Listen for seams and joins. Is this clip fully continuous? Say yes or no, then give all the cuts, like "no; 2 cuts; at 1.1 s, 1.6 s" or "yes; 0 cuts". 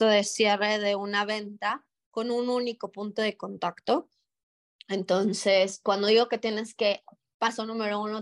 yes; 0 cuts